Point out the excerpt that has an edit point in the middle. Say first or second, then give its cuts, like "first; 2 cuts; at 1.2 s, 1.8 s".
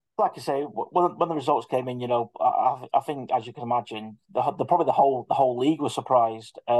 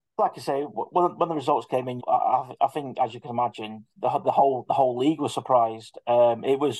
second; 2 cuts; at 2.0 s, 4.2 s